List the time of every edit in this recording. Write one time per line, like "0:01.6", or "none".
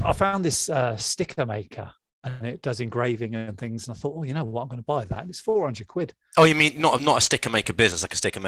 none

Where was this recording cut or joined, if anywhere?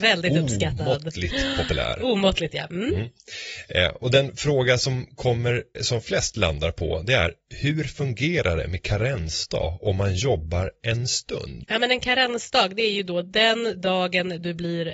0:05.7
0:11.6

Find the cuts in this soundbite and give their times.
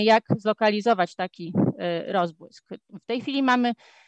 none

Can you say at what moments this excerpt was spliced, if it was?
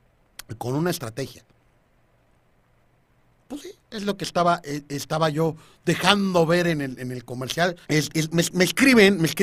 0:07.8

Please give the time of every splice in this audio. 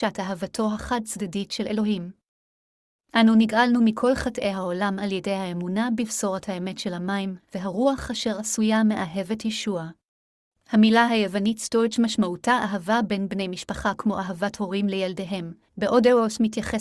0:10.5
0:15.7

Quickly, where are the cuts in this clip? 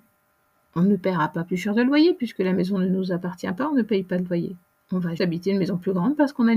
0:05.2

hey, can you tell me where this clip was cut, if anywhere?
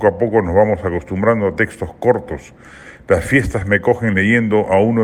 none

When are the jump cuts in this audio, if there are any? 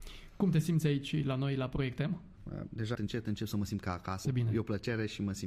0:02.9
0:04.2

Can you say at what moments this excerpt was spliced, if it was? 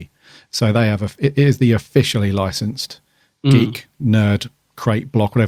none

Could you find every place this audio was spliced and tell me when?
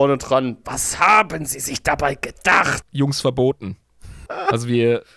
0:02.8
0:04.3

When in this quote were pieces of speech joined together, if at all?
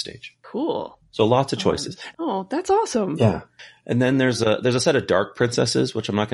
0:02.1

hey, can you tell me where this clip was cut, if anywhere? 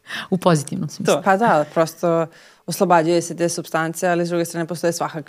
0:01.2

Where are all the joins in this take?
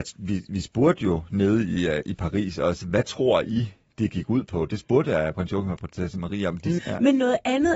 0:06.8

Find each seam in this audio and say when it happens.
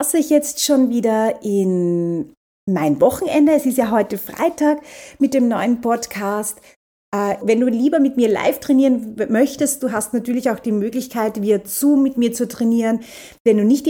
0:07.4

